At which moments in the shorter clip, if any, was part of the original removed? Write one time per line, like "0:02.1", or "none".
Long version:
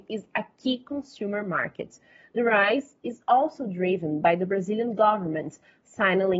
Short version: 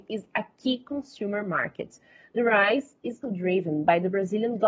0:03.2